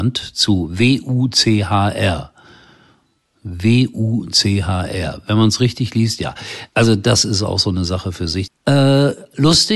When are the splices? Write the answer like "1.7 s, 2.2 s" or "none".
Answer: 6.7 s, 8.5 s